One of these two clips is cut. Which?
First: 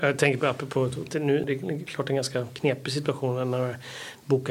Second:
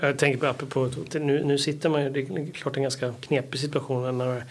first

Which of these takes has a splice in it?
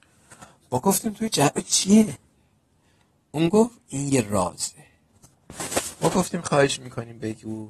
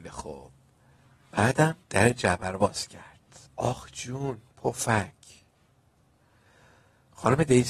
second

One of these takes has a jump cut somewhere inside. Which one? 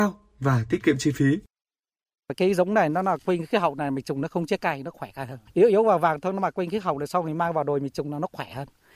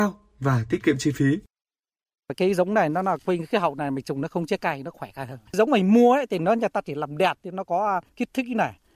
second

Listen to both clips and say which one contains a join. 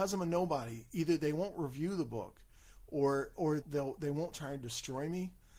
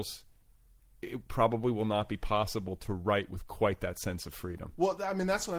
first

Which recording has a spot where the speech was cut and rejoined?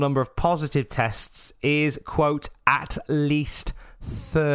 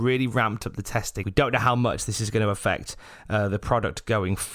second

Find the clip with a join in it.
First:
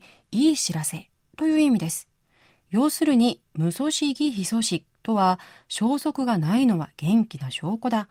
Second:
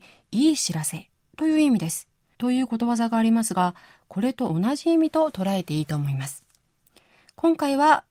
second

